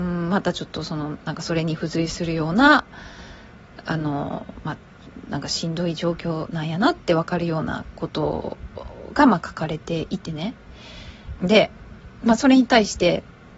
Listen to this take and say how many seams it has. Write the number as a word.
one